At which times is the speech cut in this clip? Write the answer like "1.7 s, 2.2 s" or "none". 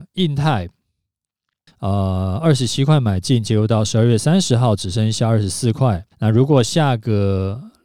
1.7 s, 6.1 s